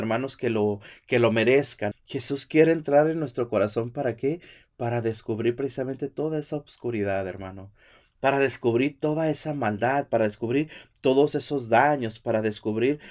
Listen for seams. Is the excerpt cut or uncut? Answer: cut